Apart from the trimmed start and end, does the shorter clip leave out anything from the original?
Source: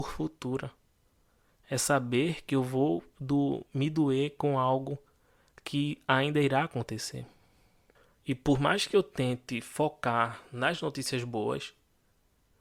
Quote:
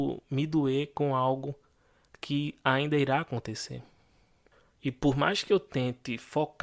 no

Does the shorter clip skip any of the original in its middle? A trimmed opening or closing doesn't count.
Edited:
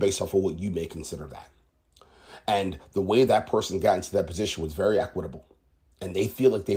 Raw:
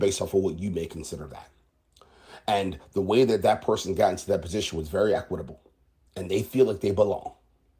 yes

